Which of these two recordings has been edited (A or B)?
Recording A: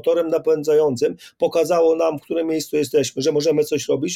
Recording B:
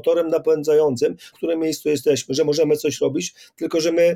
B